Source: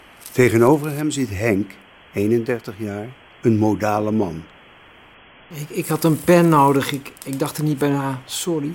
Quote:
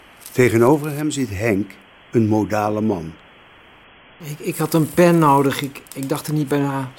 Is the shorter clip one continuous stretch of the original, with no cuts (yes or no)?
no